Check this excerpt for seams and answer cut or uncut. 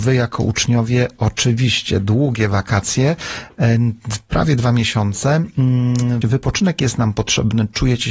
cut